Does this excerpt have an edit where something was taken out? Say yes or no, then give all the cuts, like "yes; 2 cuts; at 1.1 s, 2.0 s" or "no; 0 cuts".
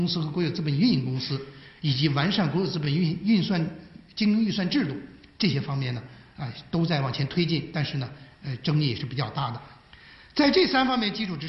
no; 0 cuts